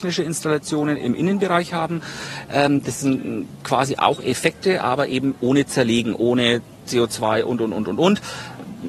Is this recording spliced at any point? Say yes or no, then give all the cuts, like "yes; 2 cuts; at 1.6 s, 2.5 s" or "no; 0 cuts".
no; 0 cuts